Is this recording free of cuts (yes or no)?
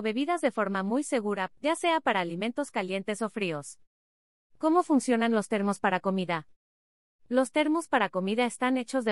no